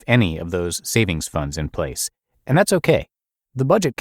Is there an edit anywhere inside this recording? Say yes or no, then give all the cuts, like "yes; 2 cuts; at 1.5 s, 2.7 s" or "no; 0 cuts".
no; 0 cuts